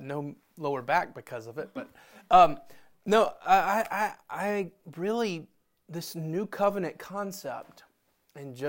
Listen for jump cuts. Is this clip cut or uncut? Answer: uncut